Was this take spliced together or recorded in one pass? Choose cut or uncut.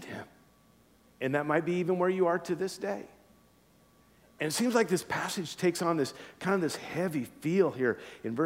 cut